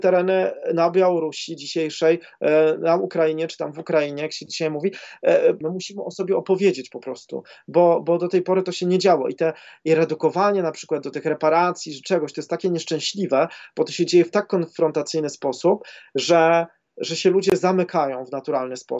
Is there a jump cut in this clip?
yes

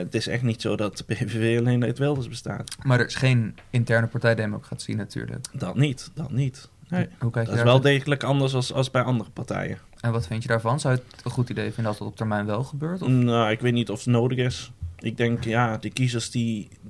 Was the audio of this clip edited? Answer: no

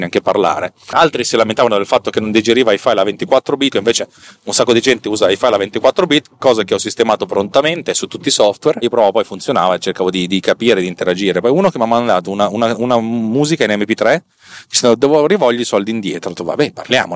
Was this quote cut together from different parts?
yes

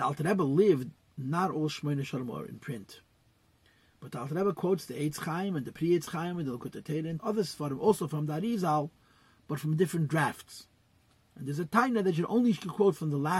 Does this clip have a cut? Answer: yes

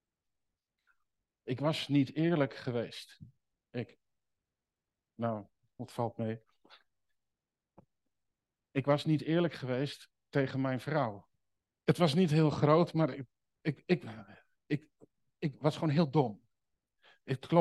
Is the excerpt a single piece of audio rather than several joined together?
no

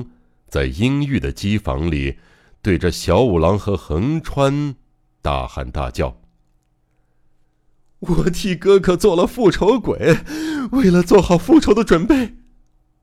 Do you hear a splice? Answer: no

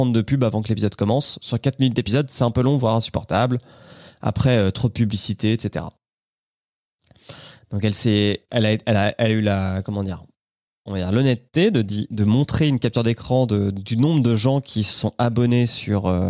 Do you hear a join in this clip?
no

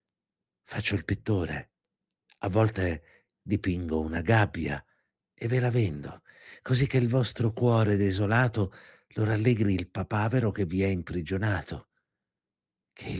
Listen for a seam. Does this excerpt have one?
no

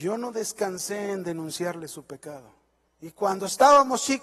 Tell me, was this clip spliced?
yes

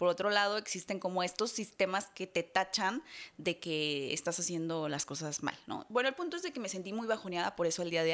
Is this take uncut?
yes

